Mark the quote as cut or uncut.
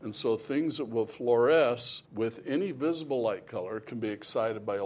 cut